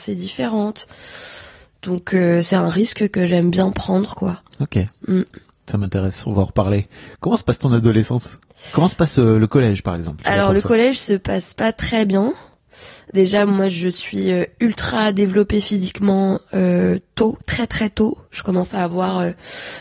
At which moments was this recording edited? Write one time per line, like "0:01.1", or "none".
none